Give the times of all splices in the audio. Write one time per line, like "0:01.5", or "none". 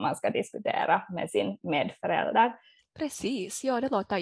0:02.8